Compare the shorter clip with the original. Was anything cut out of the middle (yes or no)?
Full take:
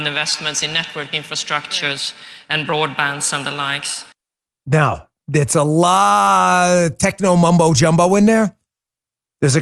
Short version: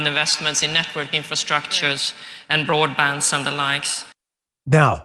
no